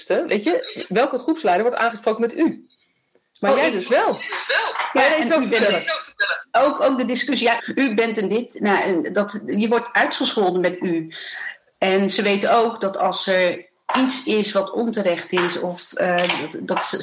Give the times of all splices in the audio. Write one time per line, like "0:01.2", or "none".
0:07.6